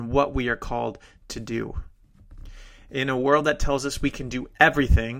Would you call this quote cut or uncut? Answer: uncut